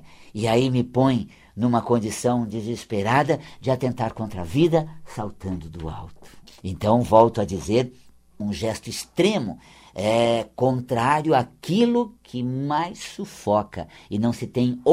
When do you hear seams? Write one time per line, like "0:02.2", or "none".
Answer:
0:06.5
0:08.4